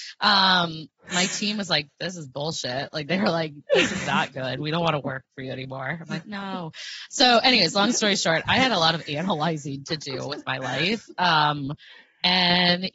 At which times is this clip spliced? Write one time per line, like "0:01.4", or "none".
none